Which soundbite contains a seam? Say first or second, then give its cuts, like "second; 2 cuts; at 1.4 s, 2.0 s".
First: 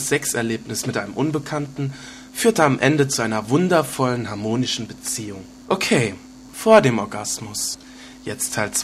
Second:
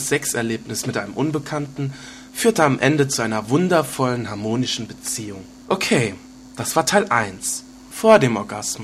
first; 1 cut; at 6.5 s